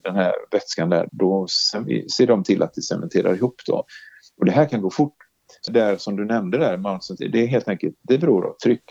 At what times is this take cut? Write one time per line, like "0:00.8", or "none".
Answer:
0:01.1
0:05.7
0:07.2